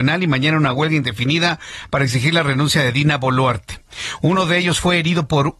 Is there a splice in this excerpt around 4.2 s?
yes; 1 cut; at 4.2 s

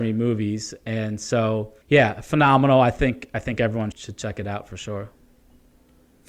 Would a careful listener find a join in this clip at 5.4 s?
no; 2 cuts; at 1.8 s, 3.9 s

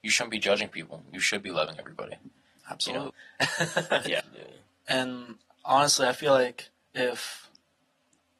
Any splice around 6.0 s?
no; 2 cuts; at 3.1 s, 4.2 s

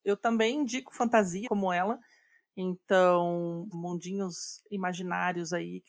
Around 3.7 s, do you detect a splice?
yes; 2 cuts; at 1.4 s, 3.7 s

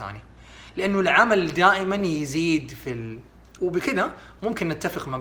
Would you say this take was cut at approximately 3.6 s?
yes; 1 cut; at 3.6 s

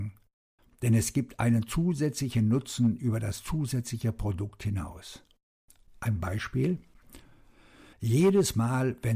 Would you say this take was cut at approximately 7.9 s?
yes; 1 cut; at 7.9 s

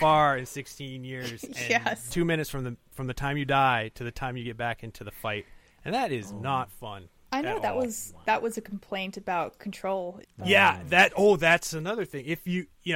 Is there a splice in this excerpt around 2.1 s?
yes; 2 cuts; at 2.1 s, 10.2 s

